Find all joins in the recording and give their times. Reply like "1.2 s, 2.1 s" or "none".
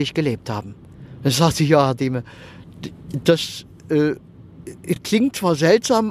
none